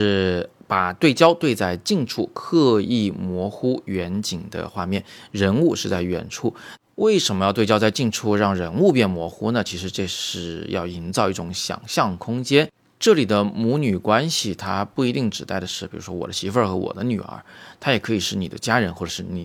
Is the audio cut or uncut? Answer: uncut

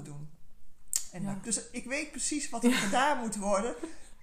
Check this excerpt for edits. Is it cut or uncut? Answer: cut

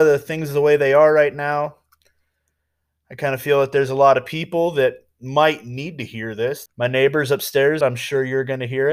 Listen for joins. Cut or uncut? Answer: cut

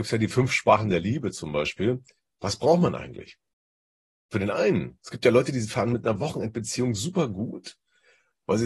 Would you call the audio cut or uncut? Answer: uncut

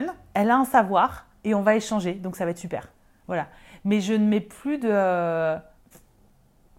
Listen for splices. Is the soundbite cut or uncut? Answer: uncut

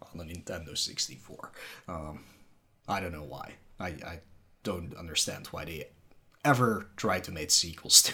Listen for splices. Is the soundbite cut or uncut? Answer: uncut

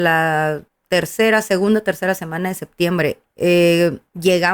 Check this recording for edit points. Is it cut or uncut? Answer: cut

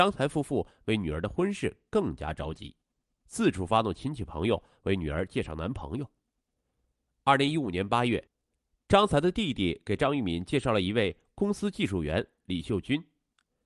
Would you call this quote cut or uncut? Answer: uncut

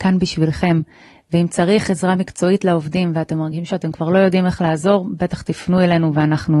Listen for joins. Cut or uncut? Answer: uncut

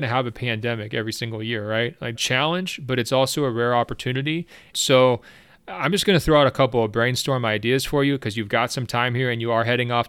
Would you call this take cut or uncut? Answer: cut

